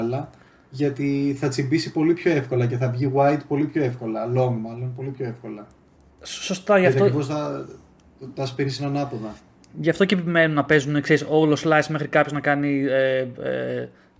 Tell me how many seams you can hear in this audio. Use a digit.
0